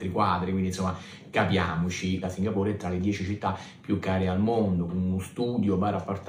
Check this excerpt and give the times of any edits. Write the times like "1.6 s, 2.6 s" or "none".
2.2 s, 4.9 s